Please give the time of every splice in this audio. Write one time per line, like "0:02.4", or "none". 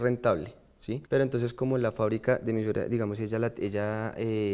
0:01.1